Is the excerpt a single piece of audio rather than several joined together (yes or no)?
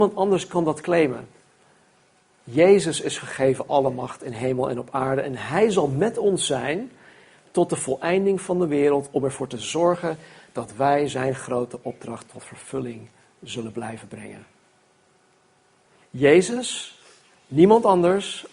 no